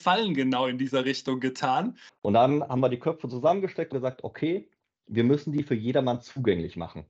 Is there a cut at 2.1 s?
yes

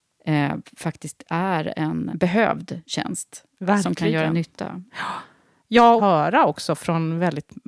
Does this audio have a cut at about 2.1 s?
yes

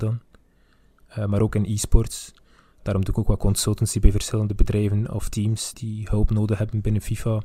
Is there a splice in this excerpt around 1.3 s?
no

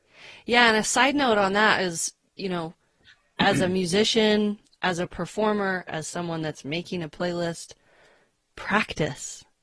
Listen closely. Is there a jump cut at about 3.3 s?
no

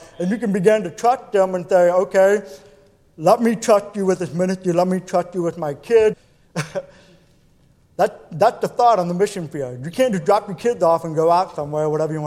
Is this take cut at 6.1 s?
yes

